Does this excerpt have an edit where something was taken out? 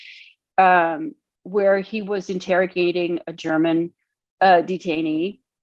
no; 0 cuts

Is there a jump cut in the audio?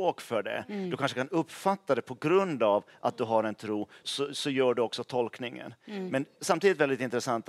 yes; 1 cut; at 4.0 s

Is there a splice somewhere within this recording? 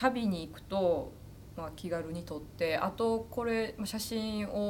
no; 0 cuts

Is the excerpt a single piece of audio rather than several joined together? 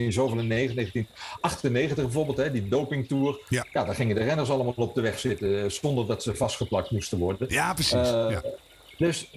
yes; 0 cuts

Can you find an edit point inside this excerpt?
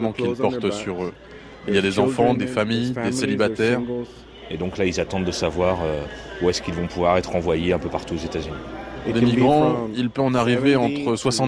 yes; 1 cut; at 2.3 s

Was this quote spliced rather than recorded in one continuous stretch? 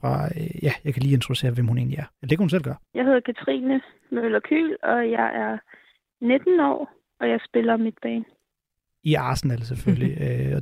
no; 0 cuts

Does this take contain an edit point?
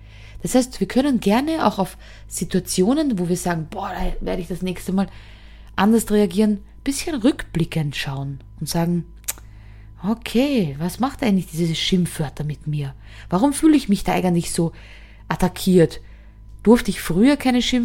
no; 0 cuts

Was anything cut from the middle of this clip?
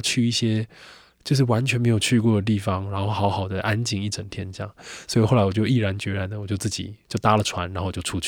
no; 0 cuts

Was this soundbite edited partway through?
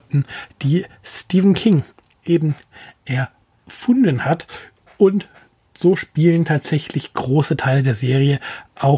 no; 0 cuts

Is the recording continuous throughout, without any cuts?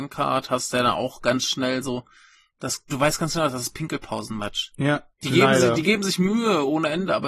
no; 2 cuts; at 2.9 s, 5.1 s

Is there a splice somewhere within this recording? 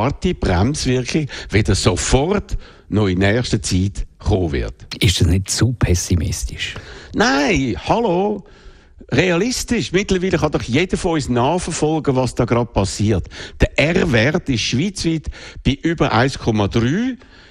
no; 0 cuts

